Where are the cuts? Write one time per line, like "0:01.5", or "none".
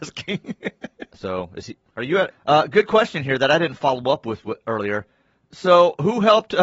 0:01.1
0:02.3